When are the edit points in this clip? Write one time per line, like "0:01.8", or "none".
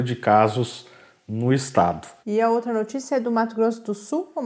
0:02.2